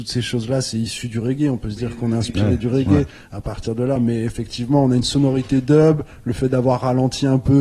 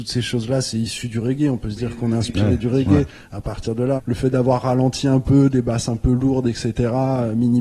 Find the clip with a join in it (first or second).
second